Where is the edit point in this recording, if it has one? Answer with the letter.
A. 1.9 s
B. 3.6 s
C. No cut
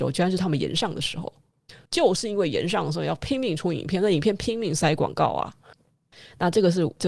A